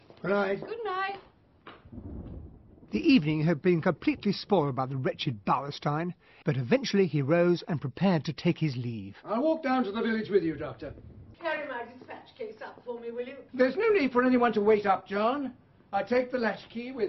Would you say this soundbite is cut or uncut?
cut